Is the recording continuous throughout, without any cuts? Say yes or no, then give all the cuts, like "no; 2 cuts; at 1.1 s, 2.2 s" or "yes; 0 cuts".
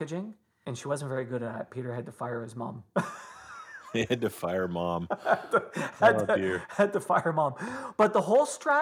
yes; 0 cuts